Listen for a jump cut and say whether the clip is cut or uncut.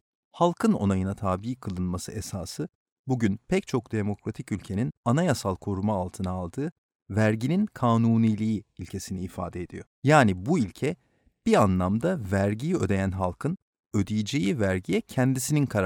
cut